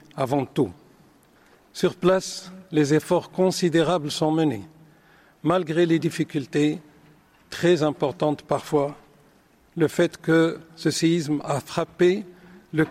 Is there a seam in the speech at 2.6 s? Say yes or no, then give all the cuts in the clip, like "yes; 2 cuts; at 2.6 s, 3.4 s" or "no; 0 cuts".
no; 0 cuts